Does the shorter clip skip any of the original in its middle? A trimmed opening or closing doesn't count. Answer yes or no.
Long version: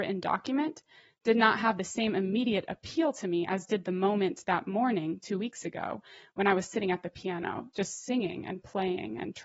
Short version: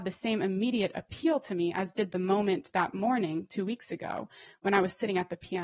no